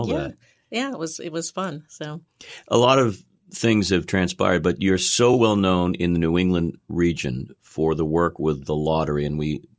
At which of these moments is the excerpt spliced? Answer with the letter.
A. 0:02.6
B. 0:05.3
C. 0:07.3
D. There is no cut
D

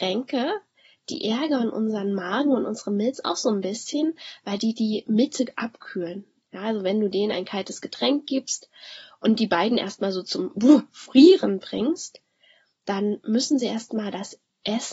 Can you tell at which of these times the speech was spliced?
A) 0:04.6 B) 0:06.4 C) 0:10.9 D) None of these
B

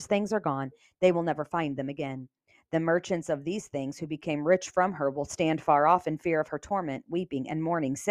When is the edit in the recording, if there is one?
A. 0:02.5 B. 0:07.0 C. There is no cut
C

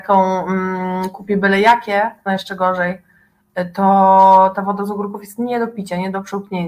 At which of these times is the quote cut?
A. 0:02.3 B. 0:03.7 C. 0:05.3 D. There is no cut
A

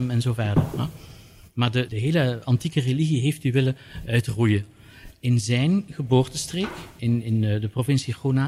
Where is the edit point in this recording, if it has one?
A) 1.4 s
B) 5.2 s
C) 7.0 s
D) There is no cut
C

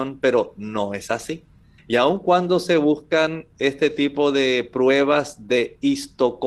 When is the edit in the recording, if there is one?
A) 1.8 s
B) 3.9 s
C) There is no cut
A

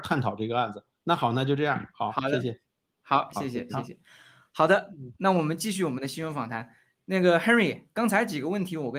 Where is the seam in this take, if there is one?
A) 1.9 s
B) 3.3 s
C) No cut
B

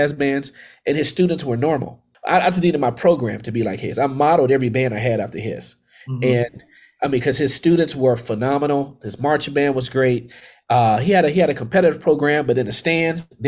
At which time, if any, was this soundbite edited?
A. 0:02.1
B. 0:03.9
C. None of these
A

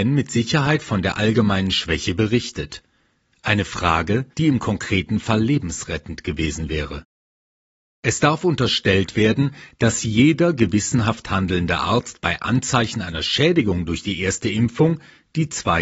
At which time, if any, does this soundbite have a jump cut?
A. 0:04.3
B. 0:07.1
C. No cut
A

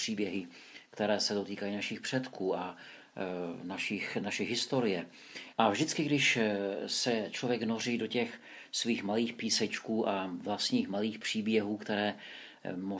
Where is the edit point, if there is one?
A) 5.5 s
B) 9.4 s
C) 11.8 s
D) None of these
A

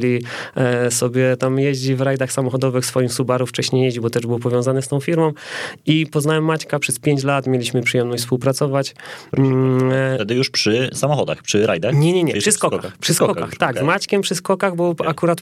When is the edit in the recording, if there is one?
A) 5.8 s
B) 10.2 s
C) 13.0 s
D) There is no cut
D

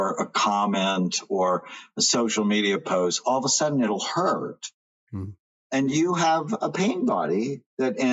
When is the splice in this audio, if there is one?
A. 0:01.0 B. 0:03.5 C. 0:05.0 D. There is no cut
C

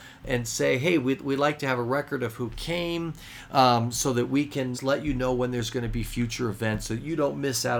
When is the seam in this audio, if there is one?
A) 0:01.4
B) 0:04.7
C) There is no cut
B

